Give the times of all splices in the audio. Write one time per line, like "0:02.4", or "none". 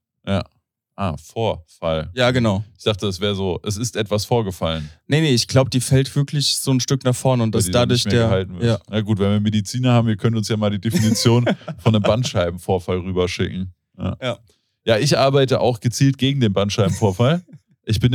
none